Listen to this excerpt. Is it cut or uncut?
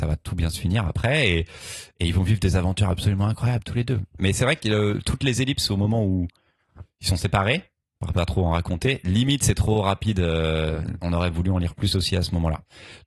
uncut